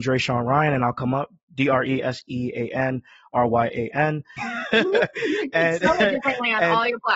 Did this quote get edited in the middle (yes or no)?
yes